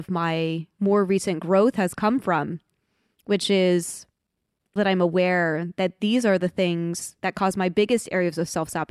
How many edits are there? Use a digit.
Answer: 1